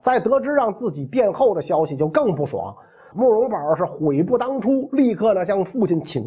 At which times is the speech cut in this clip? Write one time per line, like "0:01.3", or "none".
0:03.1

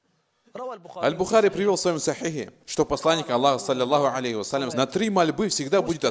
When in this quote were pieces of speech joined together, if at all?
0:02.6
0:04.7

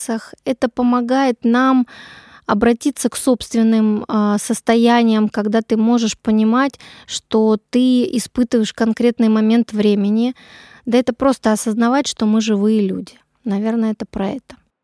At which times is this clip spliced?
none

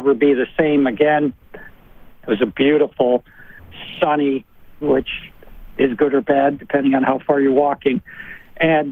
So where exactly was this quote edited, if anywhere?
0:02.1
0:04.8

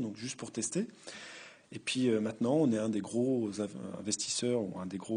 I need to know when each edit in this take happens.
0:01.6

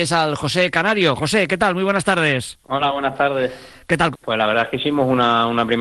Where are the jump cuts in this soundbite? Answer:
0:04.1

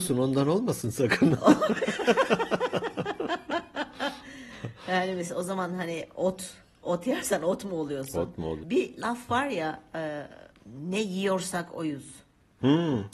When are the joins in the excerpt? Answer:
0:08.6

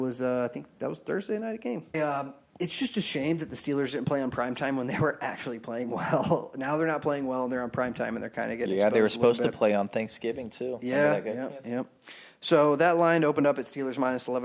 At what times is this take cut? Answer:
0:01.9

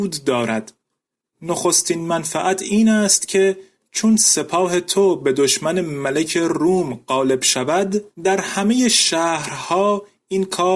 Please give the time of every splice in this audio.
0:08.1

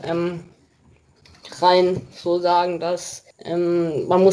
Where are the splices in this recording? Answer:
0:03.3

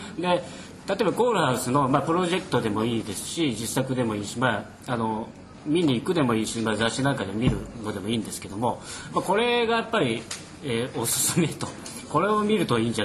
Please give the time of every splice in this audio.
none

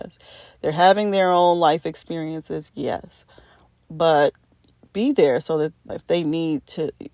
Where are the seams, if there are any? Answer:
0:05.9

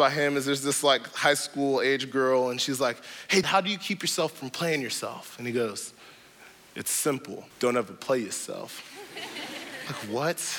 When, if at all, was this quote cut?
0:03.4
0:07.5

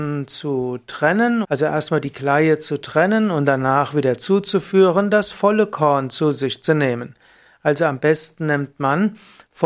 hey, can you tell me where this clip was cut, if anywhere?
0:01.4

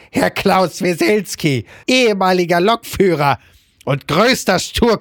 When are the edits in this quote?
0:01.8

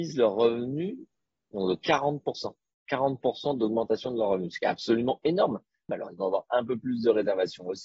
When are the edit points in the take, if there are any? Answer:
0:05.9

